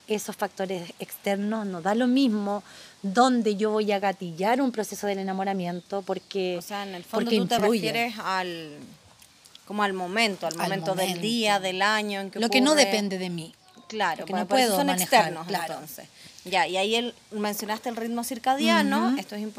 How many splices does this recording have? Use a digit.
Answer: 0